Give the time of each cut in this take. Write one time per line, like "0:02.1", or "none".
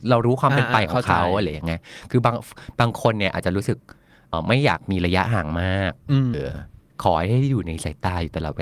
0:04.3
0:06.3